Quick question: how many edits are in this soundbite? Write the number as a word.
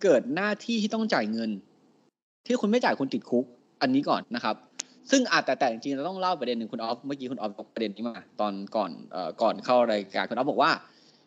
one